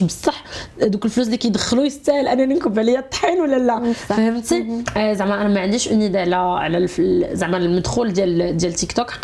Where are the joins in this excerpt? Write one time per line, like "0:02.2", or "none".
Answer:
none